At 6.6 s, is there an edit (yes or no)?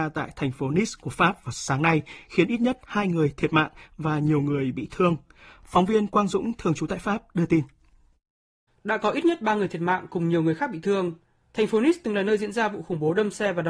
no